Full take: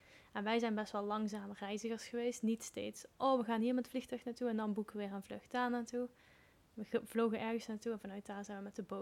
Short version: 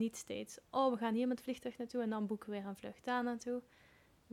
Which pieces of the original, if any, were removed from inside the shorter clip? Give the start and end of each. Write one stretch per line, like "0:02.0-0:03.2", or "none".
none

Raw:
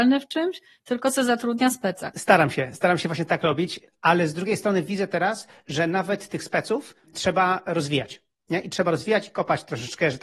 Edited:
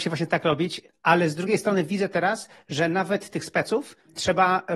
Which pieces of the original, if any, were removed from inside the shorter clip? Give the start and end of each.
none

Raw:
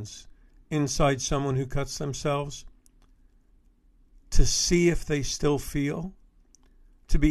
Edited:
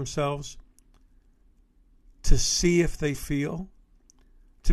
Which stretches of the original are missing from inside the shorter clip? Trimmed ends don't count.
0:05.2-0:05.6

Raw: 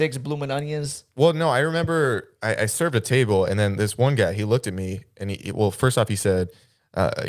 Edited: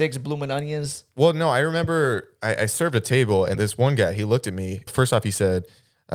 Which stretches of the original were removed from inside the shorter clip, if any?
0:03.5-0:03.7
0:05.1-0:05.7

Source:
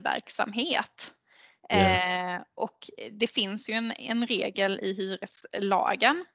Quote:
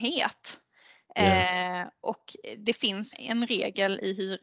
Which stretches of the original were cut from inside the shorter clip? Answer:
0:03.7-0:03.9

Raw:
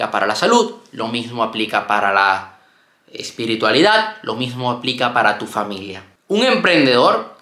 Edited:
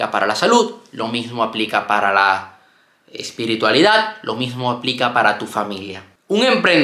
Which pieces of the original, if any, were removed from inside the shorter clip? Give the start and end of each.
none

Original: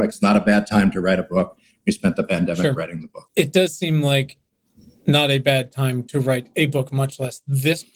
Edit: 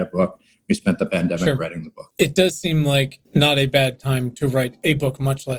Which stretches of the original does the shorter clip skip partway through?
0:04.4-0:05.0

